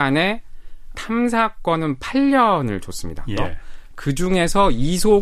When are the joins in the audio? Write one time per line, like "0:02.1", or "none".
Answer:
0:00.9
0:03.4